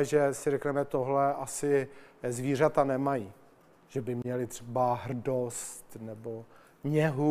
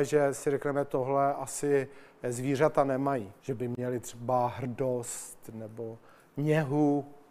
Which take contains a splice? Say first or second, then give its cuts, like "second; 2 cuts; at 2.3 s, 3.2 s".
second; 1 cut; at 3.4 s